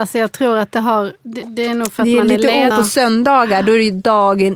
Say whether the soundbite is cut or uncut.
cut